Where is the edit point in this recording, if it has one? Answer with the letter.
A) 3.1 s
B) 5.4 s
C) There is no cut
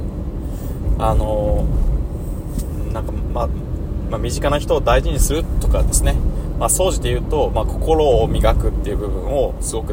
C